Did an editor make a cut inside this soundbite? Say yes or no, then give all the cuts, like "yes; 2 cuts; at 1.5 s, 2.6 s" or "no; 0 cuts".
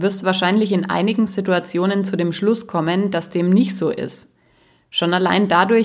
no; 0 cuts